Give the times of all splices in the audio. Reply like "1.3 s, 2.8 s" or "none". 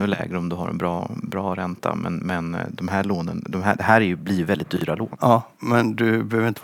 none